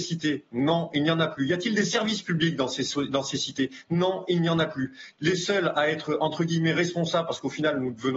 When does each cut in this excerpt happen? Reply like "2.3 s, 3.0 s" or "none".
5.1 s